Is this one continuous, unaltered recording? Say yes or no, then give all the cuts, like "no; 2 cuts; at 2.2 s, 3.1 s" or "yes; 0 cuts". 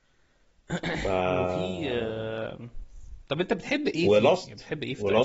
yes; 0 cuts